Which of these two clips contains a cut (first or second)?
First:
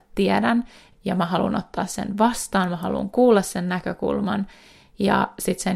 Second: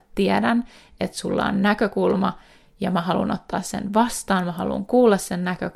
first